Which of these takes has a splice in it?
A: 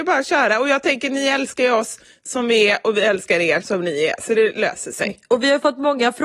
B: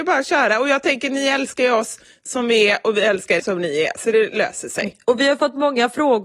B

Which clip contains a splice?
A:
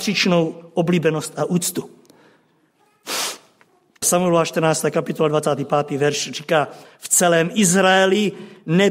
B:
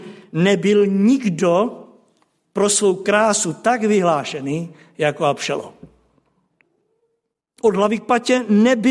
A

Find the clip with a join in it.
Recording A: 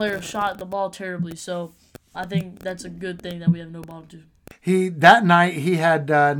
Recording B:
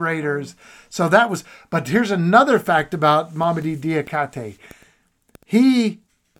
A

